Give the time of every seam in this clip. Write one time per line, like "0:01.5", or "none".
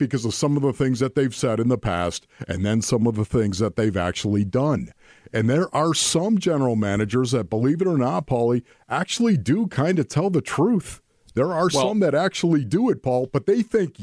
none